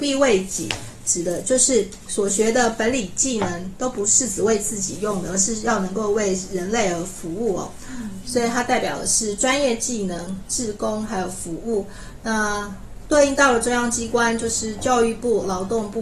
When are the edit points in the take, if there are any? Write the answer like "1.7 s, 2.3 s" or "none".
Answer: 8.2 s, 10.4 s